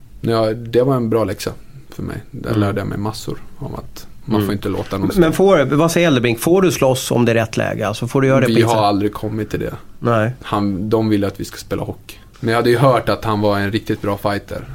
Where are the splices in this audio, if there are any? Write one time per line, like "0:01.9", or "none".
0:12.3